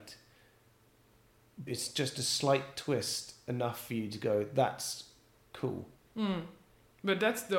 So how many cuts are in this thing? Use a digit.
2